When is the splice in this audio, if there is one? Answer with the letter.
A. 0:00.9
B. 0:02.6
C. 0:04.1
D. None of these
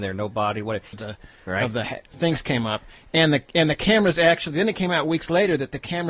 A